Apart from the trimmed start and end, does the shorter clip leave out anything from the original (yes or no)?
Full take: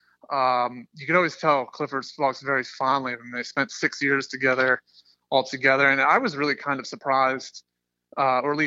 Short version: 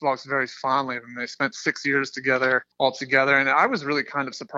yes